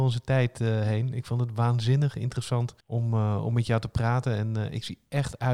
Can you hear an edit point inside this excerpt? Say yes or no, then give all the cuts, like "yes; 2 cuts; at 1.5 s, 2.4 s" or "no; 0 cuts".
yes; 1 cut; at 2.8 s